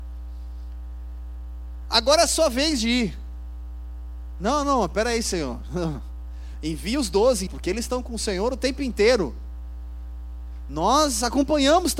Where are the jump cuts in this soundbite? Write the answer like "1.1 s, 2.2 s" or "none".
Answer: 7.5 s